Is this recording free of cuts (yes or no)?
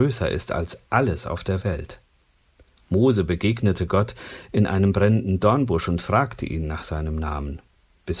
yes